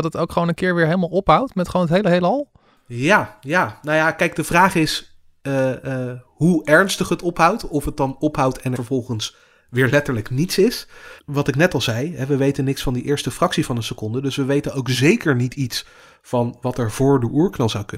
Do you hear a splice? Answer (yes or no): yes